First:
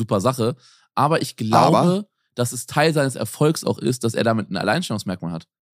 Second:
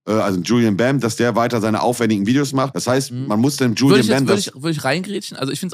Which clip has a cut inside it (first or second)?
second